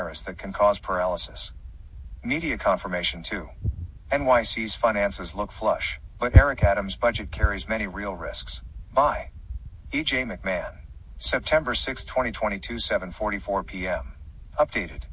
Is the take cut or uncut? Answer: uncut